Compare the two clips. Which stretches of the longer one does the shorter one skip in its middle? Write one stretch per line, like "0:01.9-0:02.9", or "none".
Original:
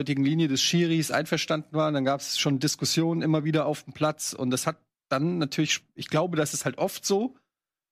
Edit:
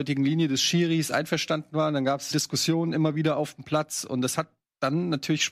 0:02.3-0:02.6